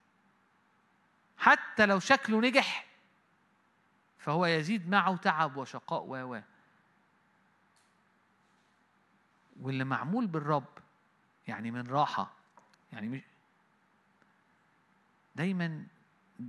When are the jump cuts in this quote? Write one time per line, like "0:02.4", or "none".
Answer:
none